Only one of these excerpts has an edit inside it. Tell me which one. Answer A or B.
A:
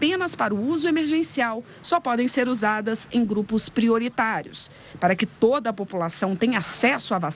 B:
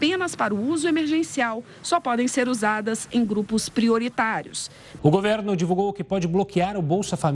B